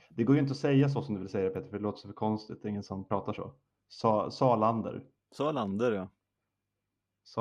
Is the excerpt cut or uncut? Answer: uncut